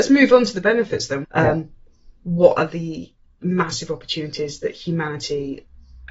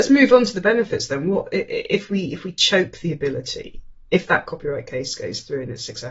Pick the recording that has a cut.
first; 1 cut; at 1.2 s

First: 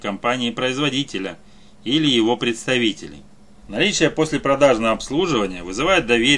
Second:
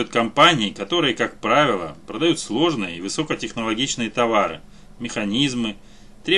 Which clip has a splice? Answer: first; 1 cut; at 3.6 s

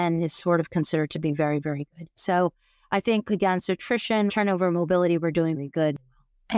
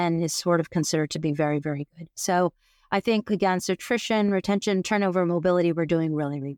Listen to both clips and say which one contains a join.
first; 2 cuts; at 4.3 s, 5.5 s

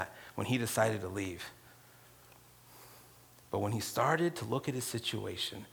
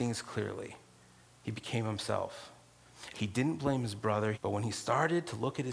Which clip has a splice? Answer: second; 2 cuts; at 3.1 s, 4.3 s

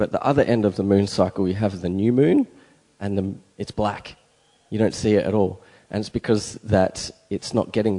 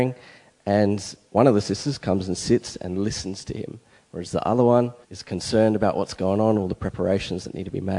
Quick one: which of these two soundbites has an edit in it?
second; 2 cuts; at 5.0 s, 6.5 s

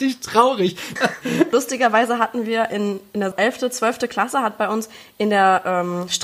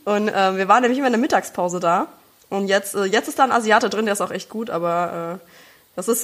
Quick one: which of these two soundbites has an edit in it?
first; 2 cuts; at 1.0 s, 3.3 s

